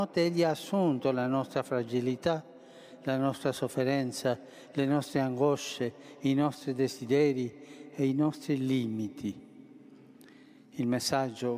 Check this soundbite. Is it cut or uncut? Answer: uncut